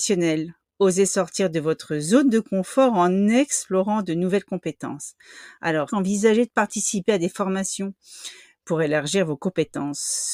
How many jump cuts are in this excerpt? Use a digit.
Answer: 1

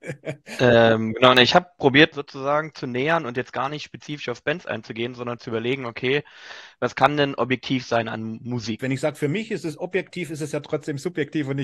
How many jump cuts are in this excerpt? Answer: 2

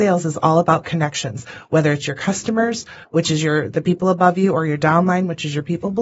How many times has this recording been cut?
1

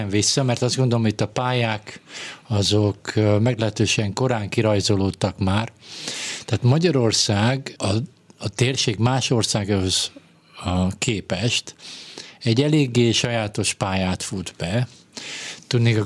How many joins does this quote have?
1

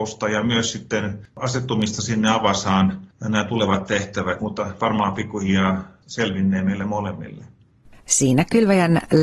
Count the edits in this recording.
1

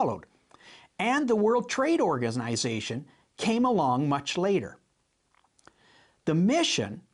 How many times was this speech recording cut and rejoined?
0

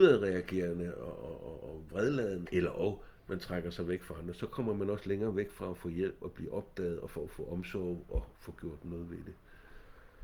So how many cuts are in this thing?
1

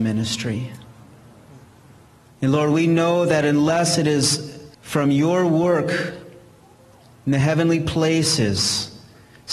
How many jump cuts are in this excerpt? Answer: 2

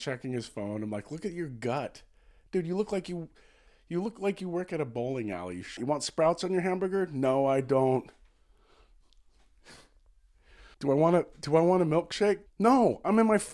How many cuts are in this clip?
3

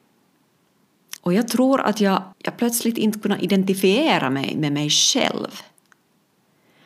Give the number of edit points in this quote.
2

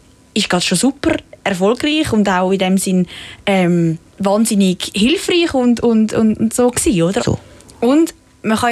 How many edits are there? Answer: 2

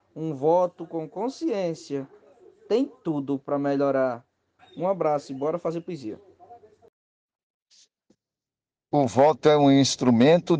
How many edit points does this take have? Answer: 1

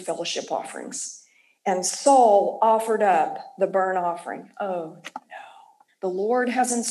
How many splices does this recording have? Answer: 1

